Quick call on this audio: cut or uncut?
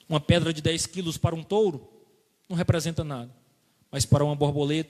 uncut